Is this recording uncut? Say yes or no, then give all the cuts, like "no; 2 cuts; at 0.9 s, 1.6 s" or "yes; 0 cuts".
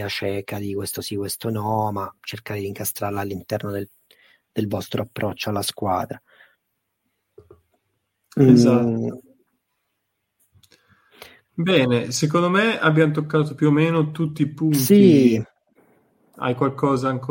yes; 0 cuts